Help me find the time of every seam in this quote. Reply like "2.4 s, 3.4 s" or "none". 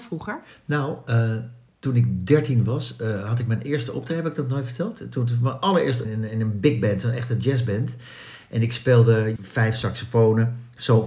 6.0 s, 9.4 s